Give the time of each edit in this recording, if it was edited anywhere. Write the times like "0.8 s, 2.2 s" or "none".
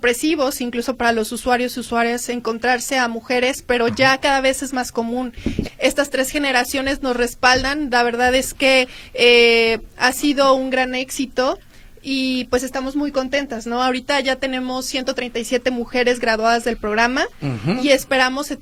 5.6 s